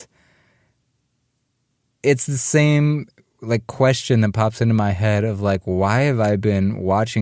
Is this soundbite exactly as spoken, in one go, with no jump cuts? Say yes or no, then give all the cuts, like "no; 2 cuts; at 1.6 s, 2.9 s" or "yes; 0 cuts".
yes; 0 cuts